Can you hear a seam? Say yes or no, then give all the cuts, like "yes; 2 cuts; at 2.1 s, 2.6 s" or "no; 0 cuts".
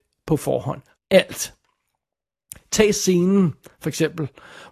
yes; 1 cut; at 1.0 s